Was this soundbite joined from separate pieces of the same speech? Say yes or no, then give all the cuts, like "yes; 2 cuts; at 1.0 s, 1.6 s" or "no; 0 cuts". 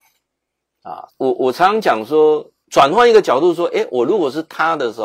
yes; 2 cuts; at 1.1 s, 2.6 s